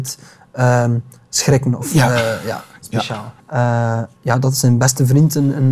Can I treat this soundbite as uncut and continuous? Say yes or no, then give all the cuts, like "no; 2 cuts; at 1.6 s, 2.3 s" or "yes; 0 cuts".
no; 1 cut; at 3.4 s